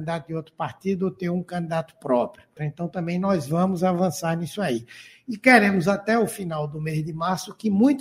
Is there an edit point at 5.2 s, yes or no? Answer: no